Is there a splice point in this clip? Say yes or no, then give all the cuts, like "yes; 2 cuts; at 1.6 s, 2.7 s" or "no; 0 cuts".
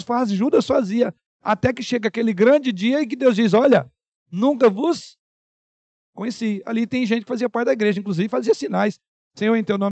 no; 0 cuts